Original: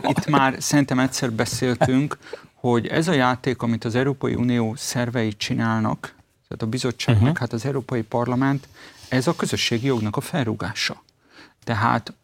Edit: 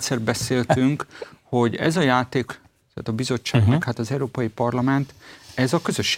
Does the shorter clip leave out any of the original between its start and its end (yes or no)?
yes